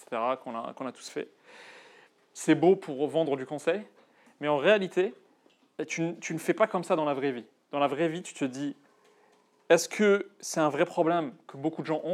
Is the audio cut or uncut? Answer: uncut